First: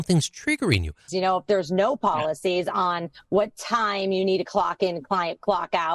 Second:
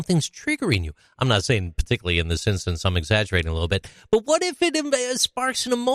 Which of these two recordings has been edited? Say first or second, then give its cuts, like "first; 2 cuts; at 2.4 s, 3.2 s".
first; 1 cut; at 1.1 s